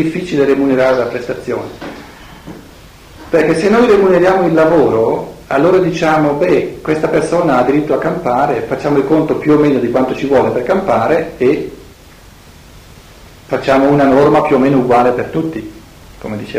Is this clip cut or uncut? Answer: uncut